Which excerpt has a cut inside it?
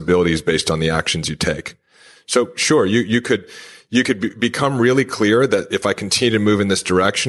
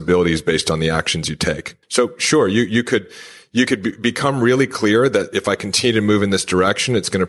second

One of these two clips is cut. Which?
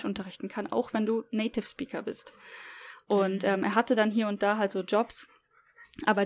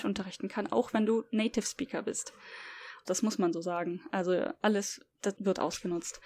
second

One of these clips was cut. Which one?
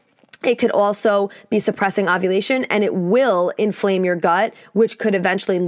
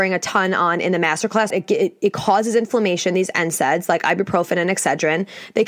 second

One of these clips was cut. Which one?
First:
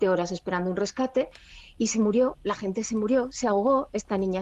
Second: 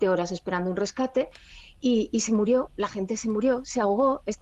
first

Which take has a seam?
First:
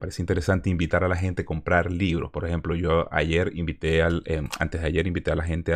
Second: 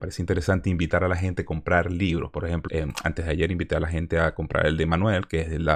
second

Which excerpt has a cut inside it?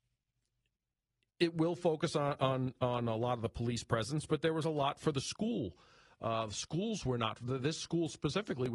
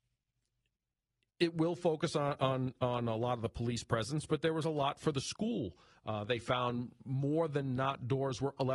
second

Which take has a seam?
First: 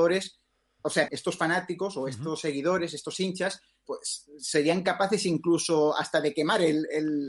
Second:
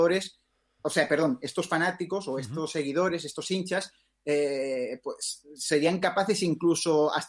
first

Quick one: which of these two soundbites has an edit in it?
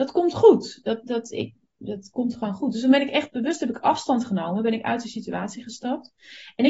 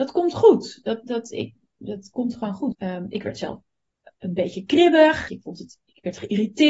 second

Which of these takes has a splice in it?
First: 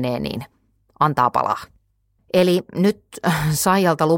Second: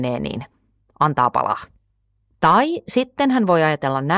first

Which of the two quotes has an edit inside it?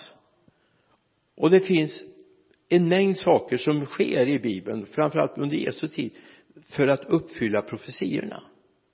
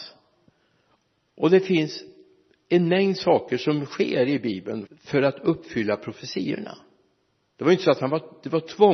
second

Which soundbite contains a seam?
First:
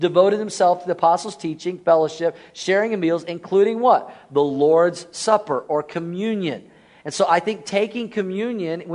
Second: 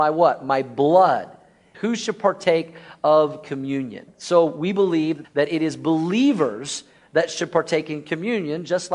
second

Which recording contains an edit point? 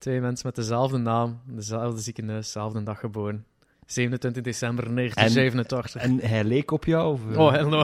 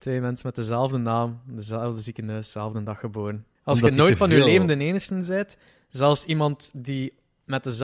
second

